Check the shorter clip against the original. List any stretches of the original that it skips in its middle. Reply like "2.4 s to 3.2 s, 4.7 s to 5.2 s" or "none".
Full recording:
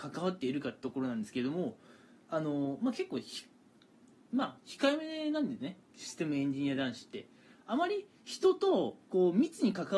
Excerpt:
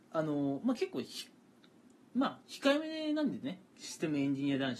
none